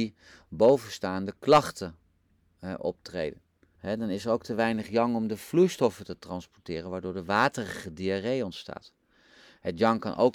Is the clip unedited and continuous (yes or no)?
no